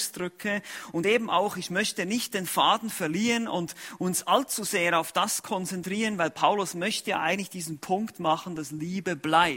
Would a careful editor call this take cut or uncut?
uncut